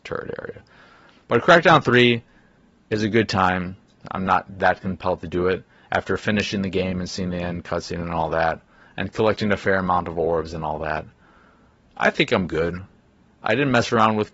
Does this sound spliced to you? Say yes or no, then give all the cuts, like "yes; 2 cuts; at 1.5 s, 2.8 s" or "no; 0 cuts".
yes; 1 cut; at 4.0 s